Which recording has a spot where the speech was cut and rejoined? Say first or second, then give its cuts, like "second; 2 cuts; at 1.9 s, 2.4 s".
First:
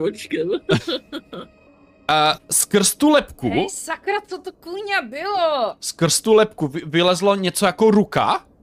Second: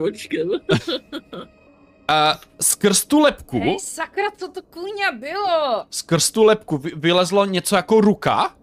first; 1 cut; at 2.4 s